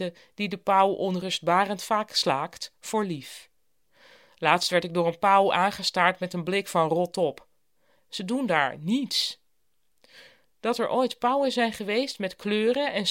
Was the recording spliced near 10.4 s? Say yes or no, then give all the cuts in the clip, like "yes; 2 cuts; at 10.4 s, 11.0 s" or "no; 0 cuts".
yes; 2 cuts; at 8.0 s, 10.4 s